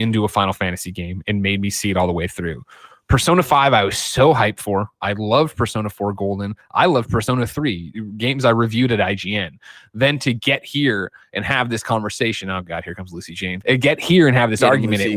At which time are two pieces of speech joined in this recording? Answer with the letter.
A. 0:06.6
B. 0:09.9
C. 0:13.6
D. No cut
C